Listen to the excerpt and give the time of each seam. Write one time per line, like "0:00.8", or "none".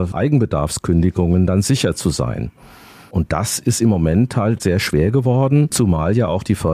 0:04.6